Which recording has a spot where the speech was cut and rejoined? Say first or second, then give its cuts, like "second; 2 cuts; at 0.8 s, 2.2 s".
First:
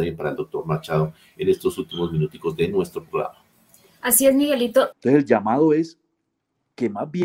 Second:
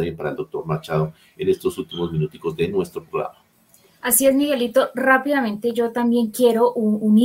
first; 1 cut; at 4.9 s